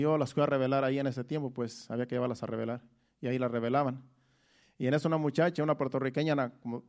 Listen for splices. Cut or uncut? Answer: cut